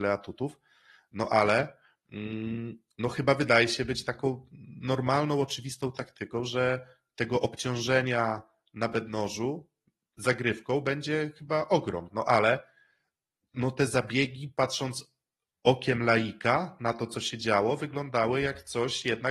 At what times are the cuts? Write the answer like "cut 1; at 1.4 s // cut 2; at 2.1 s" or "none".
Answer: cut 1; at 12.1 s